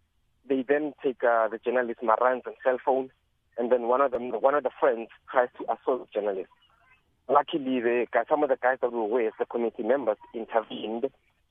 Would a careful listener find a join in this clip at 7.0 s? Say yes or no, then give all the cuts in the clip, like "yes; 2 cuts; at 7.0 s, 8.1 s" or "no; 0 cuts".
no; 1 cut; at 4.3 s